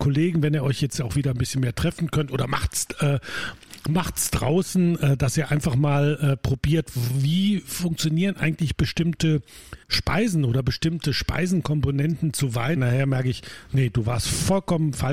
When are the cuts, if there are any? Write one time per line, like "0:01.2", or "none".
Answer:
0:09.8
0:12.8